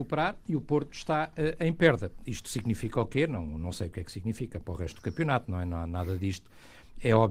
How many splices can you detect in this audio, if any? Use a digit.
0